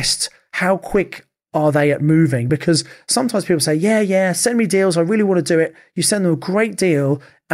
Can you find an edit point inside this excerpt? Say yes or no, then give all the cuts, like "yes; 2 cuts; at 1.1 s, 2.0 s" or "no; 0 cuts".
no; 0 cuts